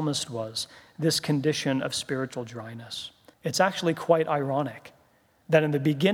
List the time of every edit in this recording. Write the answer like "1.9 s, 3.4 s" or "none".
3.3 s

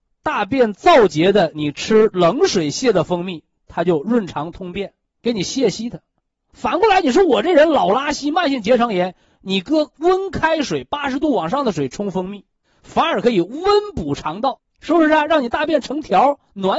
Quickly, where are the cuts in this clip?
none

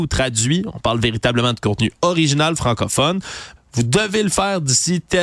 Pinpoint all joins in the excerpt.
3.6 s

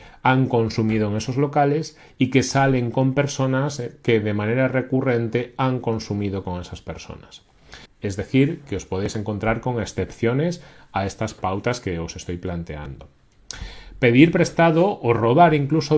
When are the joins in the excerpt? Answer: 7.9 s

